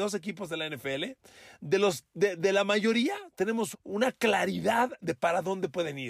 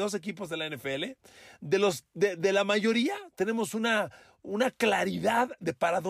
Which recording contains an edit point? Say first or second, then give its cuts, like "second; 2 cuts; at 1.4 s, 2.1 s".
first; 1 cut; at 3.7 s